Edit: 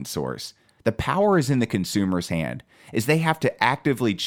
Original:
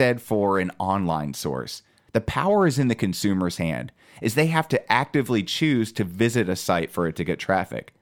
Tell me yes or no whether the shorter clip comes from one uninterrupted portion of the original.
yes